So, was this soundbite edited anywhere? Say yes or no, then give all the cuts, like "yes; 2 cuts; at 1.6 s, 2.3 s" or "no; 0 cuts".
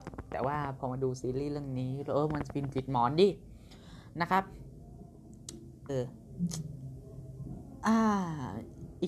yes; 1 cut; at 5.9 s